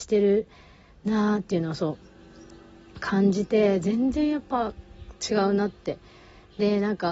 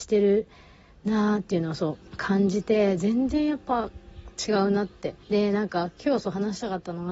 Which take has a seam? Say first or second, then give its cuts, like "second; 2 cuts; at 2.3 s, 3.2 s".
second; 2 cuts; at 2.1 s, 5.2 s